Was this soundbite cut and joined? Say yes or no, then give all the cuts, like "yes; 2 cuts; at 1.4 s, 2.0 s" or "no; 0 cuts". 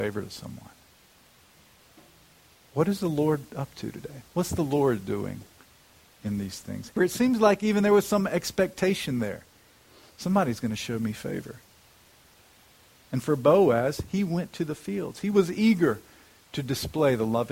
yes; 1 cut; at 7.0 s